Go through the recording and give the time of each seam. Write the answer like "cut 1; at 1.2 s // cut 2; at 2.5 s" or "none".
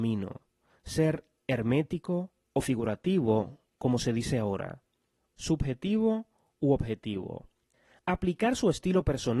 cut 1; at 5.3 s